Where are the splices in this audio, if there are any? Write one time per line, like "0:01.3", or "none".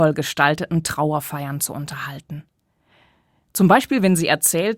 none

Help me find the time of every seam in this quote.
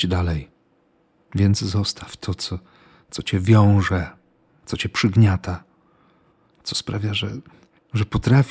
0:01.2

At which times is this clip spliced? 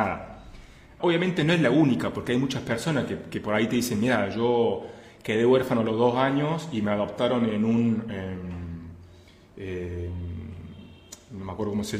0:01.0

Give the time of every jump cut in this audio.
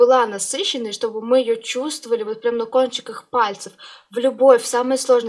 none

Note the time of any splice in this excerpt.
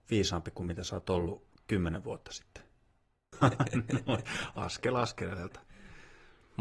0:03.3

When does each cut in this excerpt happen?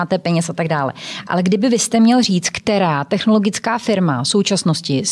none

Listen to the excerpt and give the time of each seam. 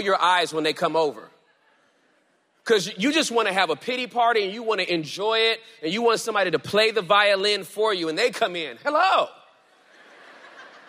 none

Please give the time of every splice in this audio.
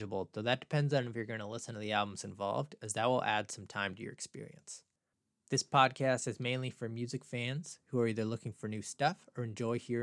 none

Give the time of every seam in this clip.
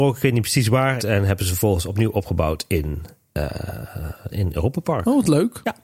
0:01.0
0:04.3

